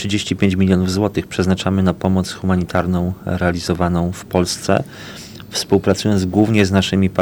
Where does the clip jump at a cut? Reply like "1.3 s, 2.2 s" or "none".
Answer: none